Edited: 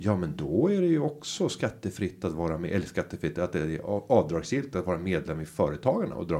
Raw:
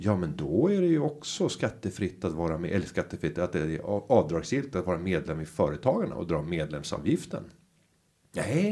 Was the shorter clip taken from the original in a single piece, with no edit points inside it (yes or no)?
yes